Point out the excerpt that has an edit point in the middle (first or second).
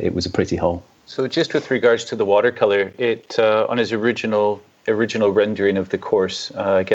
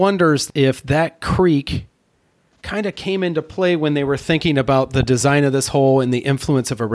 first